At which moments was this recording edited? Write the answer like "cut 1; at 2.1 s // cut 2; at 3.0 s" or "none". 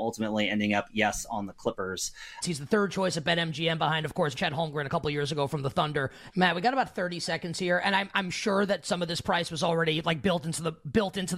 cut 1; at 2.4 s // cut 2; at 4.3 s // cut 3; at 6.3 s